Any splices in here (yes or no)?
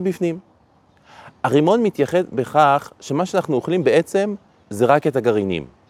no